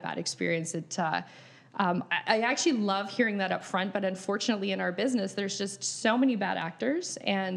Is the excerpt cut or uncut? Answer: uncut